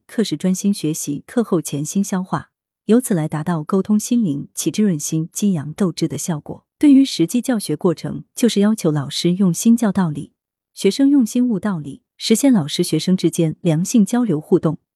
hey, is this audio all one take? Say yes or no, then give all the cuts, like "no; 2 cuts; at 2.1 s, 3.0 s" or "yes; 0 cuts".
no; 1 cut; at 6.7 s